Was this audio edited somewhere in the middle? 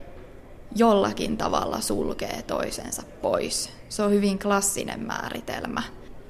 no; 0 cuts

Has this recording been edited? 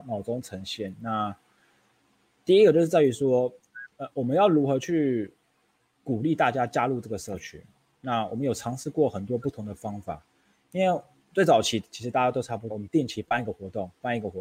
yes; 2 cuts; at 4.1 s, 12.7 s

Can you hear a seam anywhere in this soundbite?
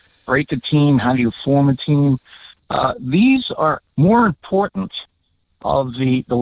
yes; 2 cuts; at 2.6 s, 3.8 s

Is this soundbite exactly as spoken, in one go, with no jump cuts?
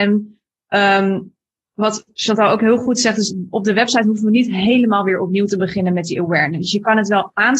yes; 0 cuts

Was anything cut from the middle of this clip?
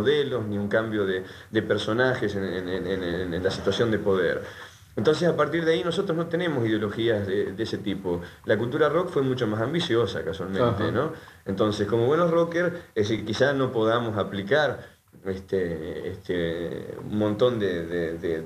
no; 0 cuts

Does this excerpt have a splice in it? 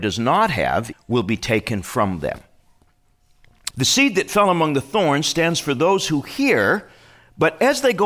yes; 2 cuts; at 0.9 s, 3.7 s

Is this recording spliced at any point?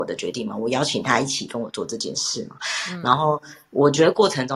no; 0 cuts

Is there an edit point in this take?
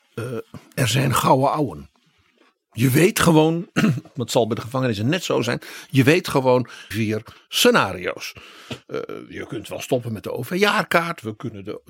yes; 2 cuts; at 4.1 s, 6.9 s

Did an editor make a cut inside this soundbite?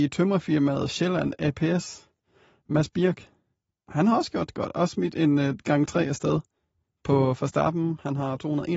no; 0 cuts

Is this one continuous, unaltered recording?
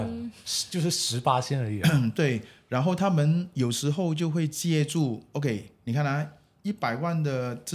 yes; 0 cuts

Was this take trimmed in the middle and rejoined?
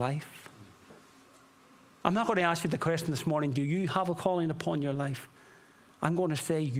no; 0 cuts

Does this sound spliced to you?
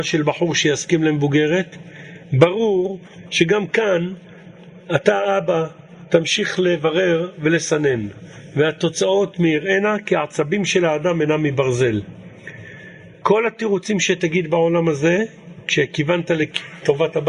yes; 1 cut; at 13.1 s

